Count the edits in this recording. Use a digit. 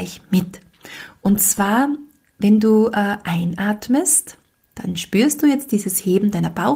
0